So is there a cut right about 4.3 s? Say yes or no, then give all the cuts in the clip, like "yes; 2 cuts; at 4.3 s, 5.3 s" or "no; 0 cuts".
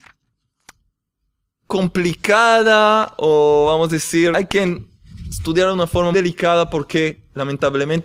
yes; 2 cuts; at 4.3 s, 6.1 s